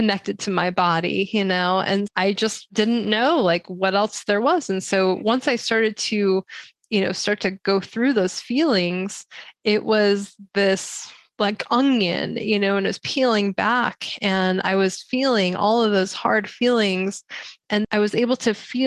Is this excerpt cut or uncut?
cut